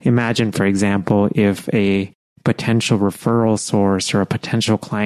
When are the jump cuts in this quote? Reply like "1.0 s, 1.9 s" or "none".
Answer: none

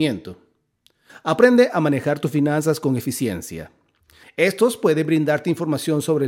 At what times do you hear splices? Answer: 1.1 s, 4.2 s

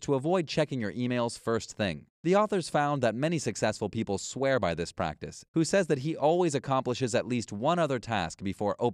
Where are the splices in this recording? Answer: 2.1 s, 5.5 s

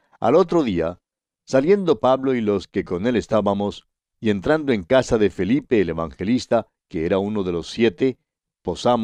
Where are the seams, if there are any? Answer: 4.1 s

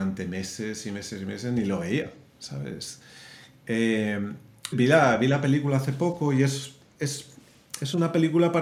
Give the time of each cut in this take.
4.7 s

